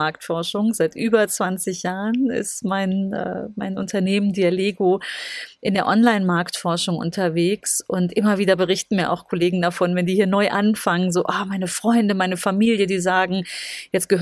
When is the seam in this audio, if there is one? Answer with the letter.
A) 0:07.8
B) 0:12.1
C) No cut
C